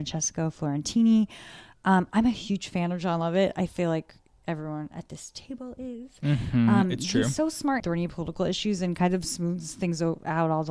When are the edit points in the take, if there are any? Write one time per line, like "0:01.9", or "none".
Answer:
0:07.8